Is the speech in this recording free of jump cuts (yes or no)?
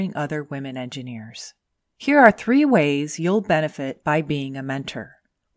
yes